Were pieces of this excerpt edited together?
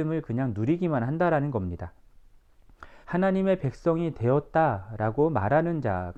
yes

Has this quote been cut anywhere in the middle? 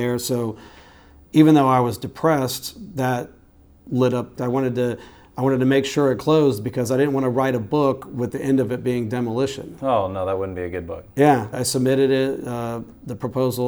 yes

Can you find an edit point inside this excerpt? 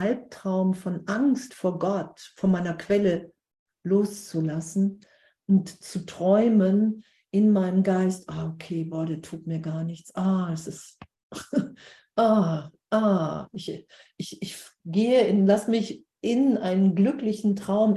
no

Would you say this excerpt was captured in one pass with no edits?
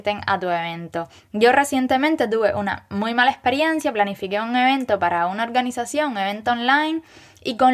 yes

